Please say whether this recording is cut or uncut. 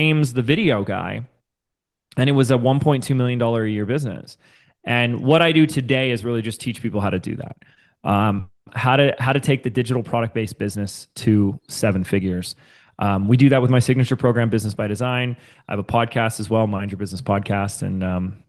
uncut